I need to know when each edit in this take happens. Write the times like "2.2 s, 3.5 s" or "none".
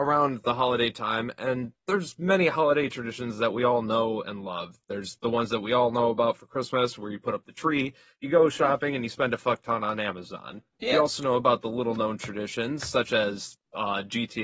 none